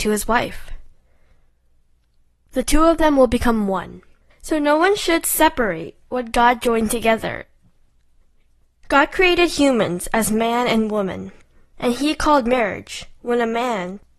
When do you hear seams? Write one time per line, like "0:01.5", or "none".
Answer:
0:04.3